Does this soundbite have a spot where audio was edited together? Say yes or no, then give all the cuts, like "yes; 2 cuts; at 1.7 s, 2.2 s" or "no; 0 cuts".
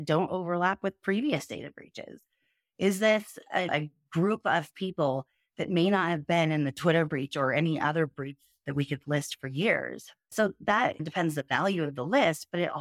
yes; 1 cut; at 10.3 s